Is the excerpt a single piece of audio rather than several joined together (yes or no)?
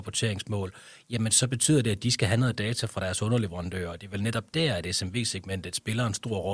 yes